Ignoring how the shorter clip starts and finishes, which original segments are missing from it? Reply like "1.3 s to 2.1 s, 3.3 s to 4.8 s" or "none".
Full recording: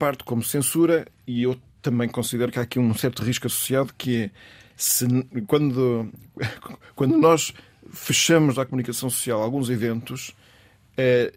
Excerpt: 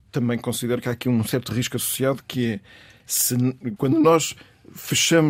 5.5 s to 6.9 s